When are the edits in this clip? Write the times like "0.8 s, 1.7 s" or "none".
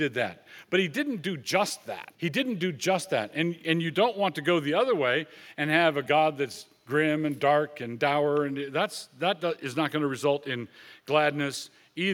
2.1 s, 6.1 s